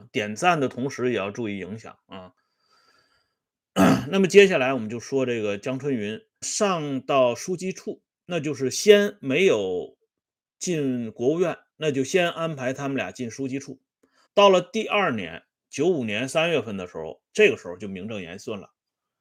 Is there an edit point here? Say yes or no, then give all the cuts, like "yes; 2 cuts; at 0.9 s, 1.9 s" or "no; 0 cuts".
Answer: yes; 3 cuts; at 6.4 s, 14.3 s, 17.3 s